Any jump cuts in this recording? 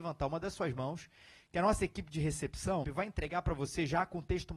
yes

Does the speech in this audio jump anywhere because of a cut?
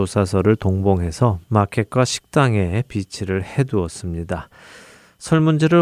no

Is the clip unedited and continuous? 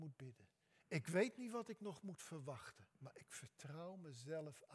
no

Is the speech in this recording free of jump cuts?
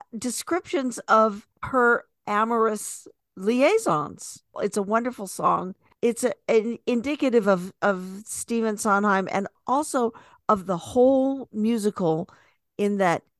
yes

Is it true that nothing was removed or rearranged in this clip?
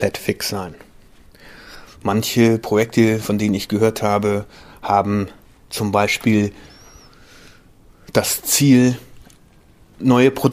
no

